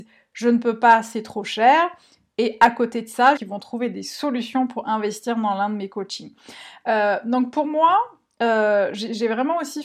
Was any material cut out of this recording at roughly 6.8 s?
no; 1 cut; at 3.4 s

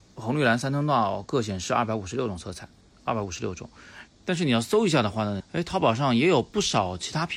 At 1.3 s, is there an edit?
no; 2 cuts; at 4.1 s, 5.4 s

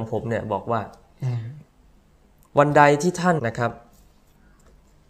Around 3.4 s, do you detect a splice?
yes; 1 cut; at 3.4 s

